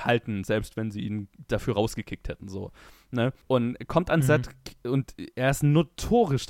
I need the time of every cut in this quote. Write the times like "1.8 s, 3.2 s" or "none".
3.4 s